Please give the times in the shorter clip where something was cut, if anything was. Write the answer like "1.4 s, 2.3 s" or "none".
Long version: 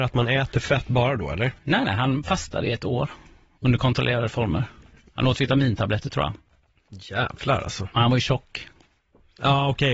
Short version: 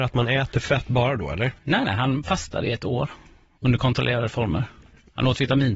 none